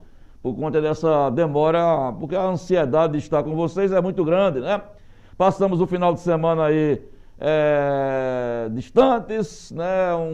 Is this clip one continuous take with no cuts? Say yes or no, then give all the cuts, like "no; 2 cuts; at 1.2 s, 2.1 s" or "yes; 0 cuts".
yes; 0 cuts